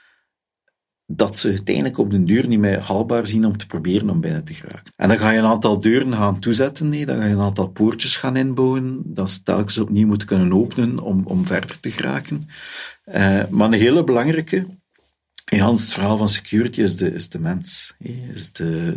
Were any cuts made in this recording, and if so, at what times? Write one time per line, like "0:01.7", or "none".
0:04.9